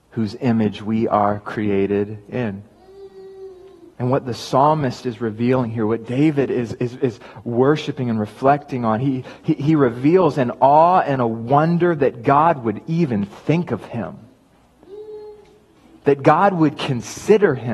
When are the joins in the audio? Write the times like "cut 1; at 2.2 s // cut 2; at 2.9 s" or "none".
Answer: cut 1; at 3.9 s